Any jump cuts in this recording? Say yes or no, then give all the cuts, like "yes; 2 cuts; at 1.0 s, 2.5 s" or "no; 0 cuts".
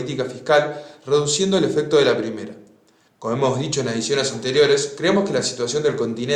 no; 0 cuts